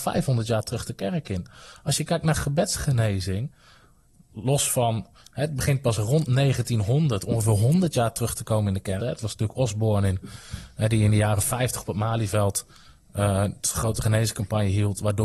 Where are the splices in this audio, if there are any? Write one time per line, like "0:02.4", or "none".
0:09.0